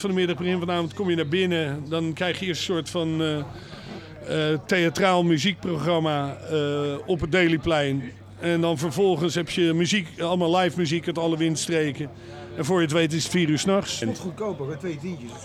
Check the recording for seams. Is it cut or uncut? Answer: cut